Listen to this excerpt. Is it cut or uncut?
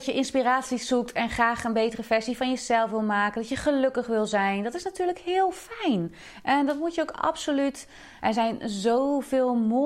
cut